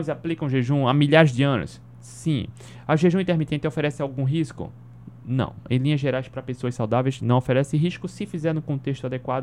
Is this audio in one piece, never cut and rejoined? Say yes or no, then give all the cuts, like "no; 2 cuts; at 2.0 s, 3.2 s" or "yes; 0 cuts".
yes; 0 cuts